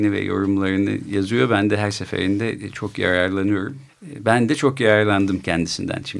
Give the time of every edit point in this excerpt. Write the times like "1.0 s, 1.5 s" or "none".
3.9 s

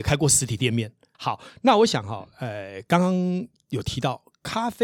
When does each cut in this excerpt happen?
1.1 s

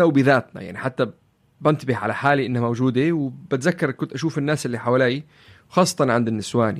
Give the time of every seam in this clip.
none

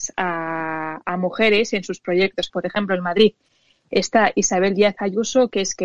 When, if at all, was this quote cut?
2.5 s

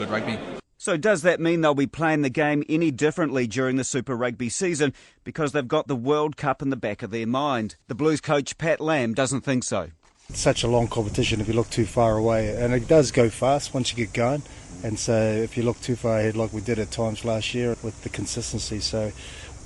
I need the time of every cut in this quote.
7.8 s, 17.7 s

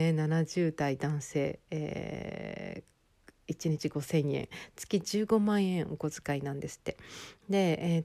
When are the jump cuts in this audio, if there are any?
none

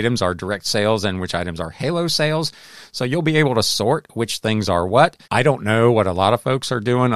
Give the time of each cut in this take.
5.2 s

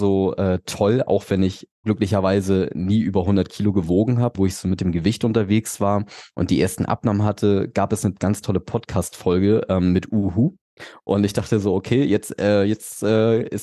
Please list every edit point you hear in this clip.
1.7 s, 4.3 s

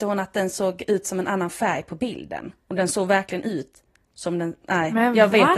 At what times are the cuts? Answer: 4.6 s

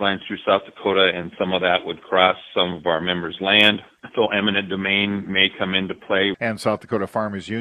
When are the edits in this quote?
6.3 s

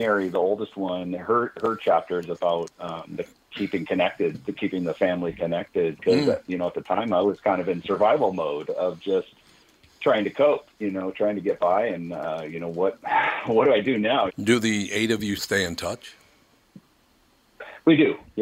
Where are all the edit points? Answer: 14.3 s, 15.4 s

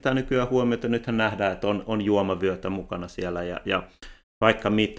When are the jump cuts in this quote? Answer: none

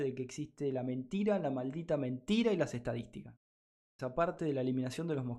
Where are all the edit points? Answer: 4.0 s

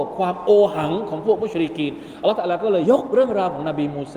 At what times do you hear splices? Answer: 2.8 s

